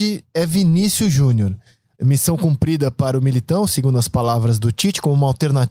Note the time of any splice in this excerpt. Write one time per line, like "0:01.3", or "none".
0:01.9